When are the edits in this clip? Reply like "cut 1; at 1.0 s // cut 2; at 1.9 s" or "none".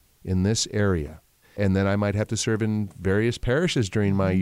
cut 1; at 1.4 s